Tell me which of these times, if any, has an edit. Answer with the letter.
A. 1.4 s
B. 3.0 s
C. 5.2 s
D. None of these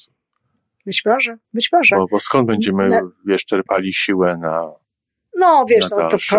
A